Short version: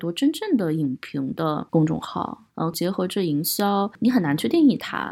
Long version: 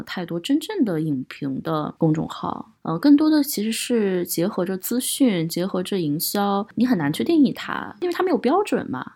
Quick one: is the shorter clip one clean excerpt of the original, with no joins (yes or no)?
no